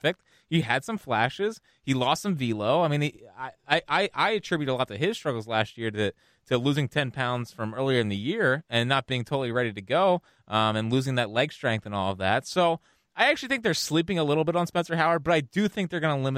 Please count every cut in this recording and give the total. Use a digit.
0